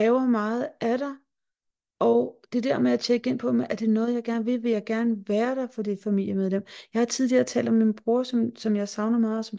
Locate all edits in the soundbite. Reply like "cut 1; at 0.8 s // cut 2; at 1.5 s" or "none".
none